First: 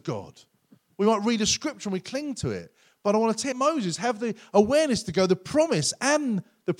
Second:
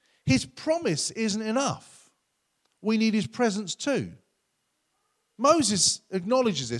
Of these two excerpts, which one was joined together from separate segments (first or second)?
first